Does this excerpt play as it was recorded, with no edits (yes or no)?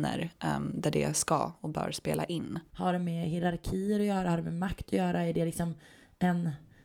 no